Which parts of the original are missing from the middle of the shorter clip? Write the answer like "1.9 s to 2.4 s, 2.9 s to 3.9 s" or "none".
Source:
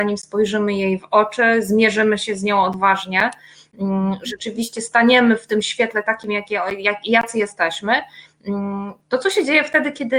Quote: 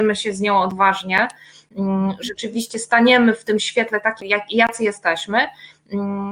6.2 s to 6.8 s